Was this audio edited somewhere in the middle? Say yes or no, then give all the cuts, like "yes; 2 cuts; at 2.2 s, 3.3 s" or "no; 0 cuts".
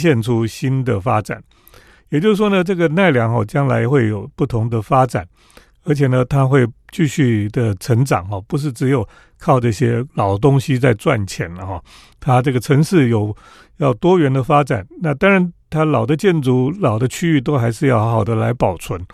no; 0 cuts